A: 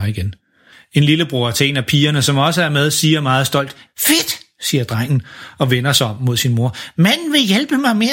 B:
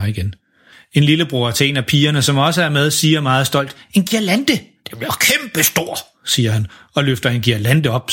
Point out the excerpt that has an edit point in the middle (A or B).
A